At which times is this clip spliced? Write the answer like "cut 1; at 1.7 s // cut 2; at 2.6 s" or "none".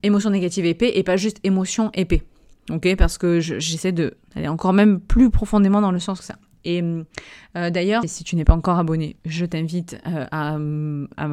cut 1; at 8.0 s